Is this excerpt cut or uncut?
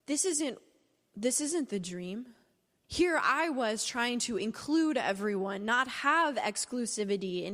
cut